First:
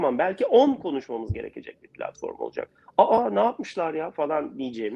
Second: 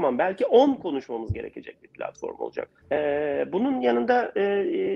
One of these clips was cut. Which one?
second; 1 cut; at 2.8 s

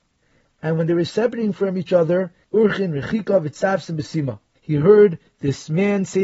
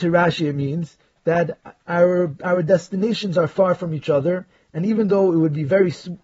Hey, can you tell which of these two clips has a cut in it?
first; 2 cuts; at 2.4 s, 4.6 s

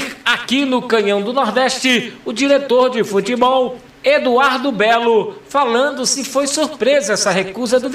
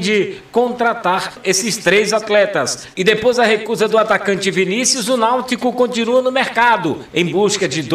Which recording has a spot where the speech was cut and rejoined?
second; 1 cut; at 2.9 s

